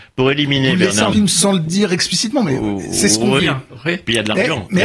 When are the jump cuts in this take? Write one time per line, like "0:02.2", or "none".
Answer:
0:01.1
0:03.4